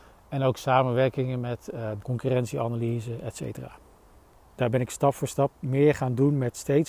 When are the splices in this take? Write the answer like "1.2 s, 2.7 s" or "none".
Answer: 2.0 s, 4.5 s